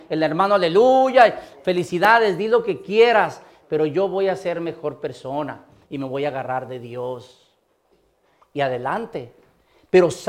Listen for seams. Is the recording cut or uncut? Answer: uncut